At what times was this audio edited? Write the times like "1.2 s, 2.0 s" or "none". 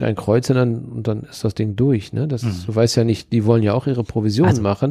none